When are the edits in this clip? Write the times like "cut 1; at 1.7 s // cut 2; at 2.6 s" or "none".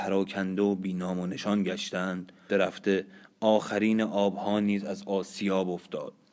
cut 1; at 2.5 s